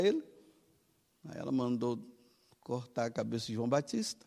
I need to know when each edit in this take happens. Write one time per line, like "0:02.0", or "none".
0:01.1

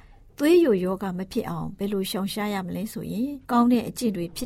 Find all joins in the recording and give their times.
0:03.4

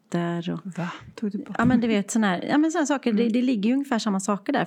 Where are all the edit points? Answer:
none

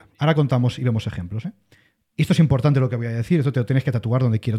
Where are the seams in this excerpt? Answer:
none

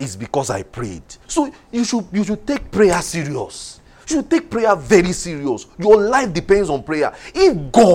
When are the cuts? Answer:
0:01.2
0:03.9

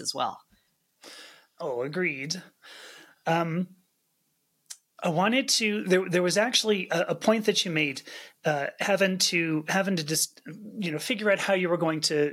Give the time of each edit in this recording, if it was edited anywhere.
none

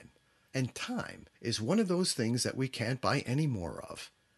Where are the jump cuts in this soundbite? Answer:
0:01.3

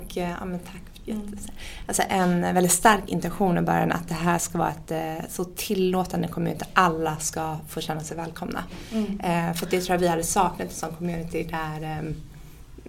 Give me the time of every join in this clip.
none

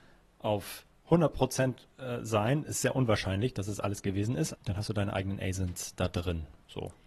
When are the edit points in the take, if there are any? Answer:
0:04.5

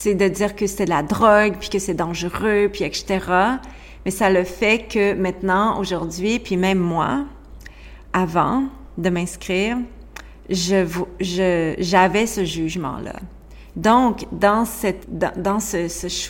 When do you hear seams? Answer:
0:13.7
0:15.0

